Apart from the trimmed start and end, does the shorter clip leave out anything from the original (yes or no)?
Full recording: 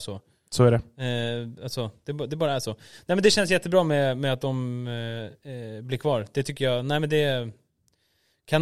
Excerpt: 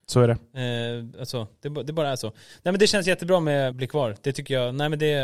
yes